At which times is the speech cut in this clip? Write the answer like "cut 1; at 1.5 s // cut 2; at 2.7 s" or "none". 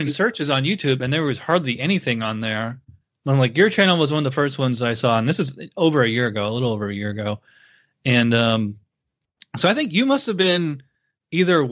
none